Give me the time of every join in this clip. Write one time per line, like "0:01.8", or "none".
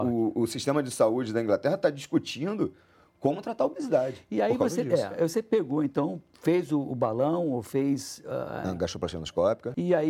none